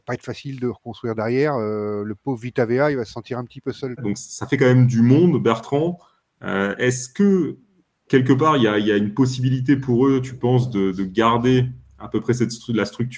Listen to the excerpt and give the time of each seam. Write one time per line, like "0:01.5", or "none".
0:04.0